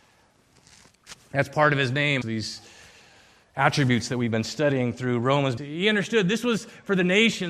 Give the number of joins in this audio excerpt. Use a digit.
2